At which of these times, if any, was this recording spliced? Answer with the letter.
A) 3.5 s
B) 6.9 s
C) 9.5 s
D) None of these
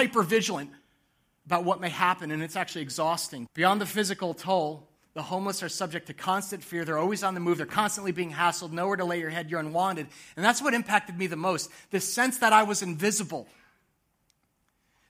A